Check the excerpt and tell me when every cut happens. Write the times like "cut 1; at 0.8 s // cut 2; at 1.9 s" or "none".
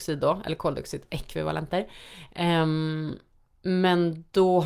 none